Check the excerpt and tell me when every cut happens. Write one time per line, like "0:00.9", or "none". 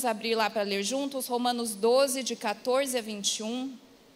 none